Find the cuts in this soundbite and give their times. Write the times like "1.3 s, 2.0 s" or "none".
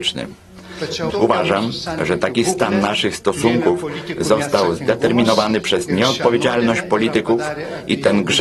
1.1 s